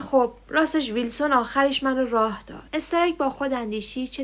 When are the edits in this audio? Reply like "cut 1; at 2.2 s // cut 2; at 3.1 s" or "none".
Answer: cut 1; at 2.7 s